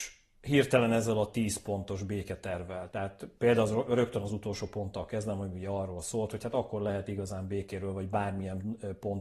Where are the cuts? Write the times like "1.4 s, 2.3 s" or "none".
2.9 s